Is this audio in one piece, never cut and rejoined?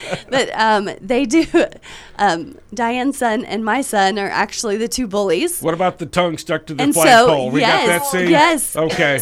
yes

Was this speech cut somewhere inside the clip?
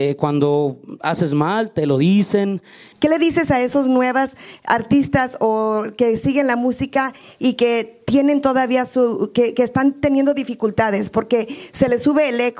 yes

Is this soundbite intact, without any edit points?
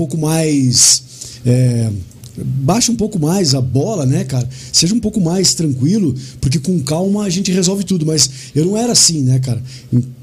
yes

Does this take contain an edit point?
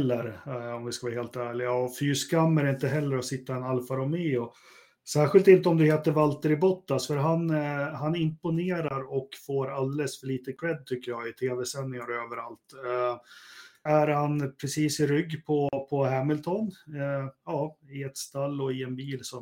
yes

